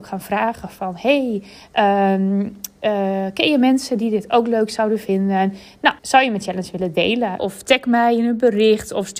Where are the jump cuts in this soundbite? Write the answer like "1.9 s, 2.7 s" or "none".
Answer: 6.0 s, 7.4 s